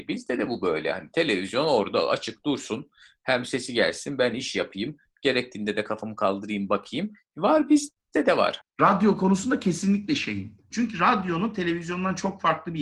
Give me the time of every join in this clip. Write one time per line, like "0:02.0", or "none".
0:08.6
0:10.7